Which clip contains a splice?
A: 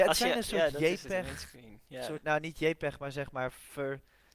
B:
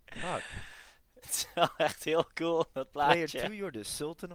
B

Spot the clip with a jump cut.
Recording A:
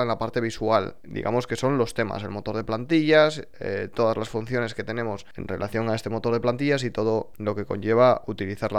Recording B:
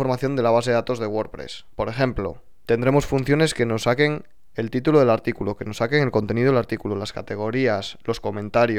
B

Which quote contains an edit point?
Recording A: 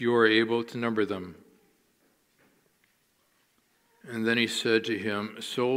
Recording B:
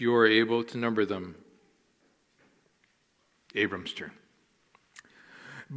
B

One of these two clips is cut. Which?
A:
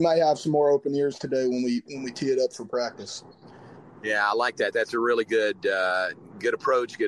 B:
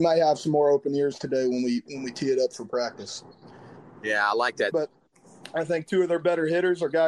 B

